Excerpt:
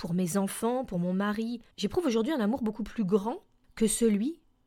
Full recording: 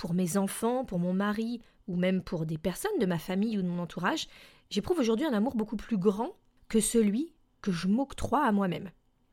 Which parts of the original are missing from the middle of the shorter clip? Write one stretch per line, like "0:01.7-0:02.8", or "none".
0:01.7-0:04.6